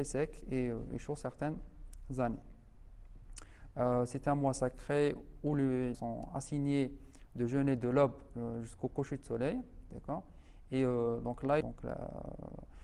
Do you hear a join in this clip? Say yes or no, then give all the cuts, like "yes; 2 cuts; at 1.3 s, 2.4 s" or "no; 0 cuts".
yes; 3 cuts; at 3.7 s, 5.9 s, 11.6 s